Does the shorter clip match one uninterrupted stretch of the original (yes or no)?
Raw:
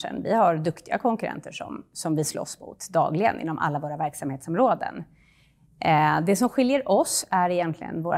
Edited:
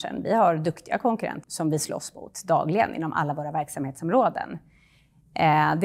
no